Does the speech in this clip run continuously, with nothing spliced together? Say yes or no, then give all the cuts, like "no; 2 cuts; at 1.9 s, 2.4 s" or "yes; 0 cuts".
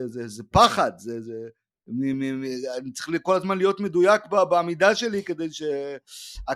yes; 0 cuts